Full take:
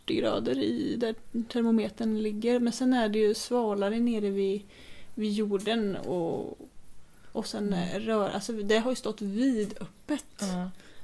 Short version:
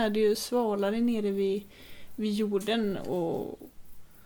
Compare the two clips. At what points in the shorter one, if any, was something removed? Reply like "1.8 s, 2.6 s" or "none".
none